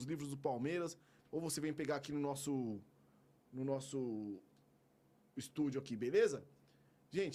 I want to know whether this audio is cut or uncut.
cut